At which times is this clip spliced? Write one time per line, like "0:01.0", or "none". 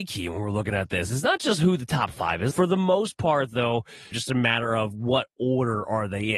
0:02.5
0:04.1

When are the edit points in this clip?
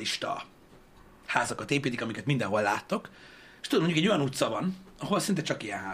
none

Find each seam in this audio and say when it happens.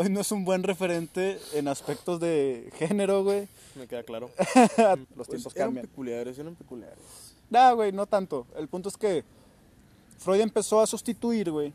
0:05.0

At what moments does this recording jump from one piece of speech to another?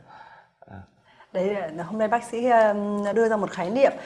0:03.1

